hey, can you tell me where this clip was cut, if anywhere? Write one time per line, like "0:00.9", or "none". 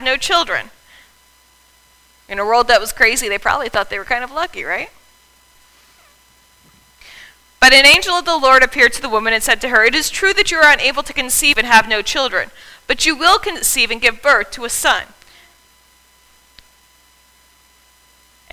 none